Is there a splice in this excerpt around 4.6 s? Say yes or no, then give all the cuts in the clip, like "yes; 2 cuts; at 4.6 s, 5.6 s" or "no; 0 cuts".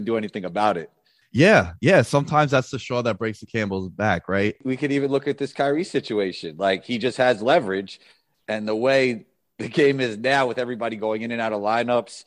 no; 0 cuts